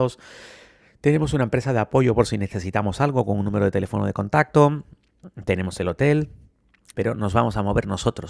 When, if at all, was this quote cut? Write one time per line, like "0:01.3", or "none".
0:06.9